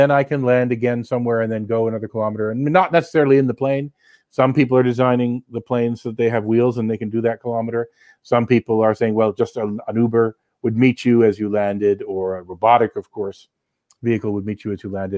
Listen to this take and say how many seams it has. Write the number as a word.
zero